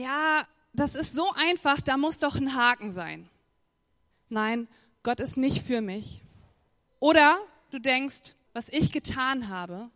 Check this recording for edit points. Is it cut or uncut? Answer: cut